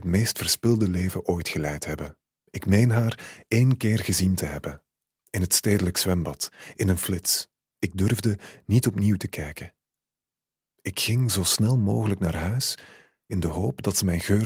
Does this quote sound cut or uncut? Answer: cut